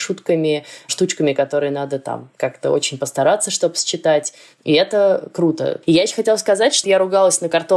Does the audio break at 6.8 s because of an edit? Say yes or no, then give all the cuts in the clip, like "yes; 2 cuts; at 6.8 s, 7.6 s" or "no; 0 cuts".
yes; 2 cuts; at 5.8 s, 6.8 s